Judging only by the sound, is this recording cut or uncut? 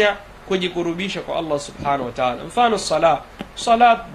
uncut